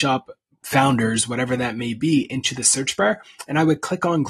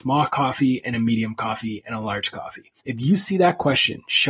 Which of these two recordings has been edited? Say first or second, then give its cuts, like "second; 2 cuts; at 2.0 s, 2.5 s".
second; 1 cut; at 2.8 s